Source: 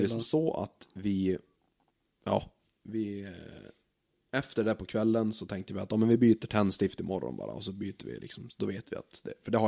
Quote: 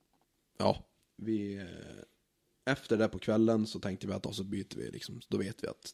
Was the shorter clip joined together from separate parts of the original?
yes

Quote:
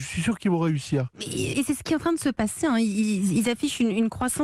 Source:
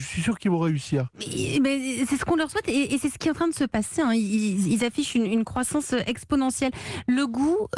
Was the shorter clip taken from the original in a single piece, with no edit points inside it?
no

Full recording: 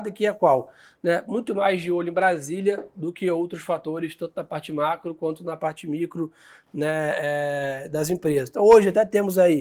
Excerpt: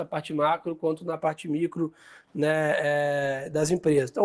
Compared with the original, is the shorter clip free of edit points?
yes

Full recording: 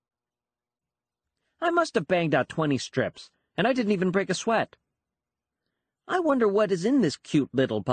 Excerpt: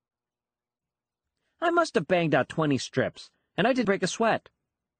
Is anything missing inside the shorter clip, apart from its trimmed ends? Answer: yes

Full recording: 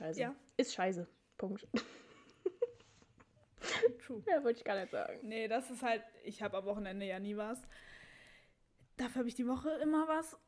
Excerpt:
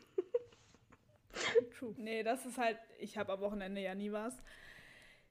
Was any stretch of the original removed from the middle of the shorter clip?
yes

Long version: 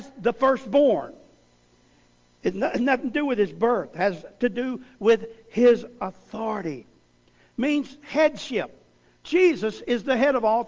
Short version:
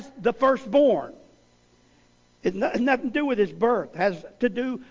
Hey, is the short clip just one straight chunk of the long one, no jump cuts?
yes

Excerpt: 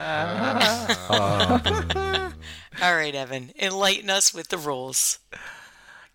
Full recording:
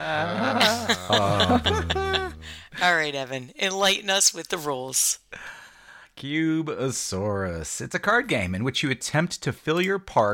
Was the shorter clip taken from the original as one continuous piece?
yes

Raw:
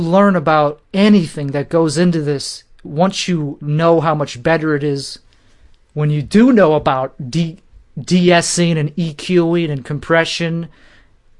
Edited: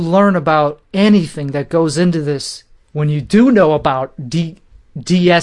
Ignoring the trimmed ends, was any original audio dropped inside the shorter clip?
yes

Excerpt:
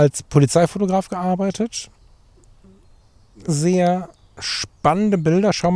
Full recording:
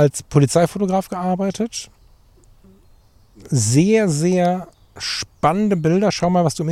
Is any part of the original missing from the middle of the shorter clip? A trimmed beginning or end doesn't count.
yes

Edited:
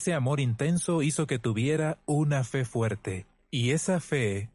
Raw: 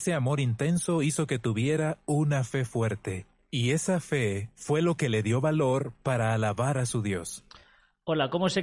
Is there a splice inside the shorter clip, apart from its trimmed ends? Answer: no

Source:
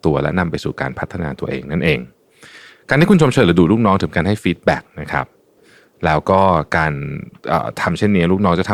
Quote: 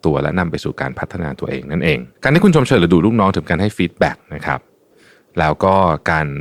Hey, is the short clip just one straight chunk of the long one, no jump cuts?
no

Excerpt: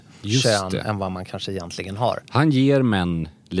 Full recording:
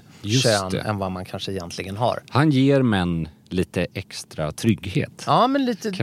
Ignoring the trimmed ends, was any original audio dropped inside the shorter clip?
no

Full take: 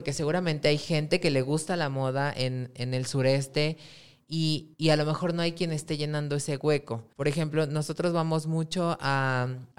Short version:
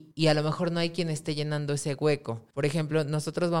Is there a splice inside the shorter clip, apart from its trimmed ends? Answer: no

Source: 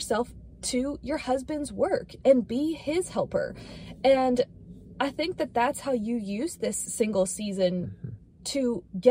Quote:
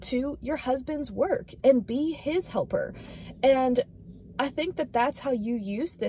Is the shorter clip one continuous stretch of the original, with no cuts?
yes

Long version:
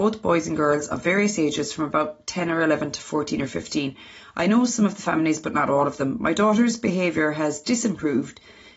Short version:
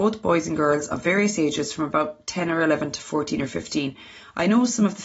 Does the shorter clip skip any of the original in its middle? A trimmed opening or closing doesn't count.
no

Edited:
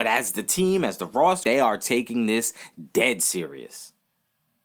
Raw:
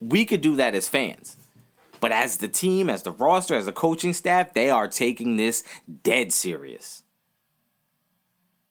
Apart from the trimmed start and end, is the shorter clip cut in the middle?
yes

